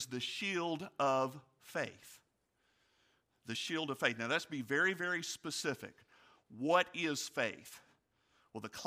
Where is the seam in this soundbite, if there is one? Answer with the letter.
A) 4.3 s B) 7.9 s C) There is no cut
C